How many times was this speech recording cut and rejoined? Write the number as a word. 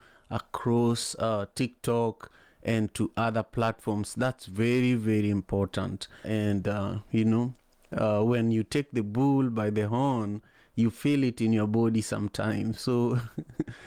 one